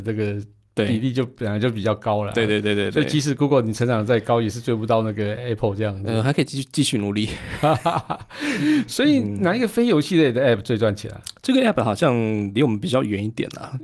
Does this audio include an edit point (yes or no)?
no